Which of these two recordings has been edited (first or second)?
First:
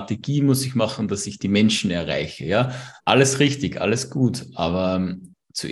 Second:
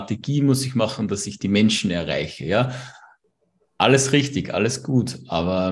first